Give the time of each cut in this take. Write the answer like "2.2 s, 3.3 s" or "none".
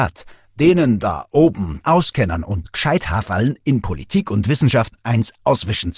1.8 s